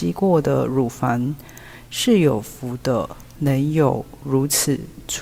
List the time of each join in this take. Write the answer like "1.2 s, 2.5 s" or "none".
3.3 s